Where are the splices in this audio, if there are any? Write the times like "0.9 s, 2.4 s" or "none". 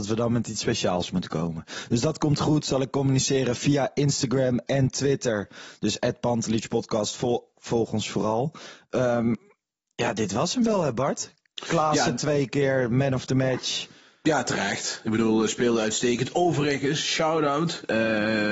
none